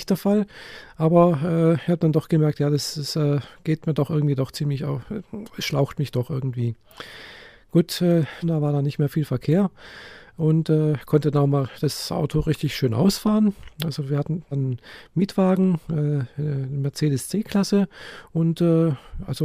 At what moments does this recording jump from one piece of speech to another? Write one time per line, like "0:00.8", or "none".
0:08.4
0:14.5